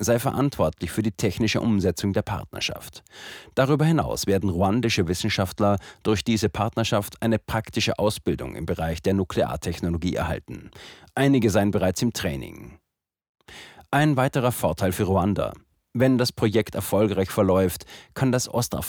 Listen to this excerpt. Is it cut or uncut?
uncut